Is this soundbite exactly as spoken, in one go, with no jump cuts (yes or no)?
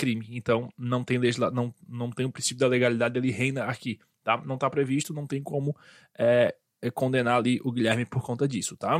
yes